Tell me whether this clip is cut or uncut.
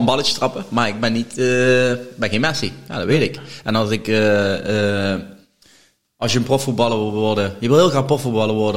uncut